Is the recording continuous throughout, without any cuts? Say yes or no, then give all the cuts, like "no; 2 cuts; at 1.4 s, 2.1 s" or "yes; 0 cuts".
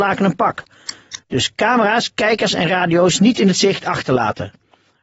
no; 1 cut; at 1.2 s